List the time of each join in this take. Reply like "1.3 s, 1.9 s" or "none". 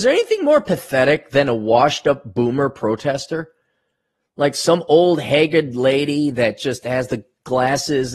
none